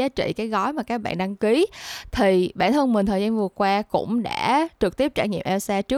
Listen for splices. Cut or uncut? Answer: uncut